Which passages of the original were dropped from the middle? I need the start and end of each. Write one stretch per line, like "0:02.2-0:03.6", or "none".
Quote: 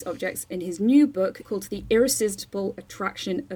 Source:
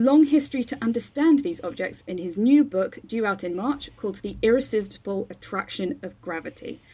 0:03.0-0:03.9